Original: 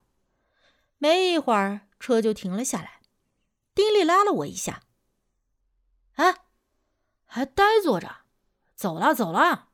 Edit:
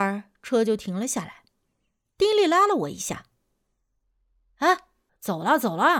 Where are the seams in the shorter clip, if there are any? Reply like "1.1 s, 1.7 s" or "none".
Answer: 5.1 s